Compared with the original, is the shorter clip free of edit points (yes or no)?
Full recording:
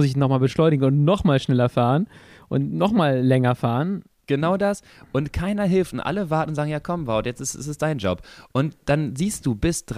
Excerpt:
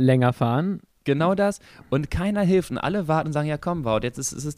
yes